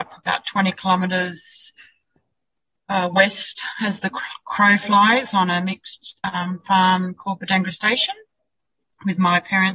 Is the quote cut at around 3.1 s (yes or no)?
no